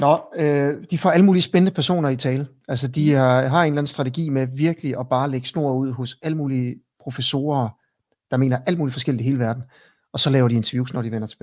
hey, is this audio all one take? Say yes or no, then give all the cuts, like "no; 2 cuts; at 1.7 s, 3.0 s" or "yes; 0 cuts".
yes; 0 cuts